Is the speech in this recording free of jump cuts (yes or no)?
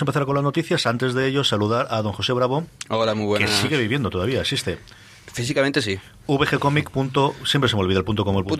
yes